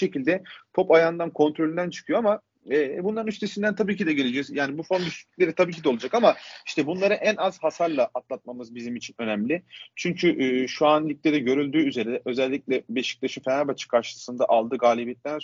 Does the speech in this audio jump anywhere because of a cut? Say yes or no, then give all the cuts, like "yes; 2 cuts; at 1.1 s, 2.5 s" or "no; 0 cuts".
no; 0 cuts